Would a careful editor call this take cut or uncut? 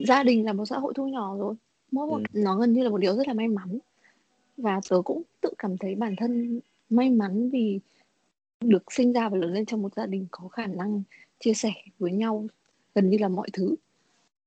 cut